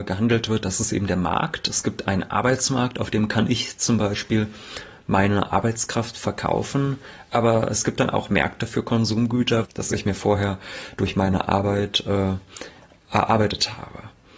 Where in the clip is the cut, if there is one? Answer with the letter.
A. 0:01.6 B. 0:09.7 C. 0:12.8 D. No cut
B